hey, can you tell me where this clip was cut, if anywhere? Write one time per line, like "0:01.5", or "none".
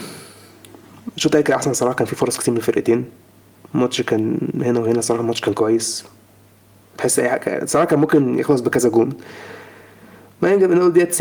none

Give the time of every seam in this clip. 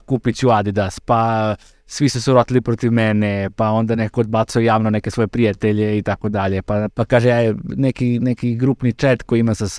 0:06.9

